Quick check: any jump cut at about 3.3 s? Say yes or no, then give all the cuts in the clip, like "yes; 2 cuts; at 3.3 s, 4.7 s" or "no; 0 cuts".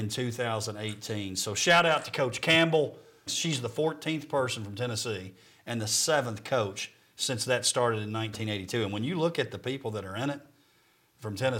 yes; 1 cut; at 3.3 s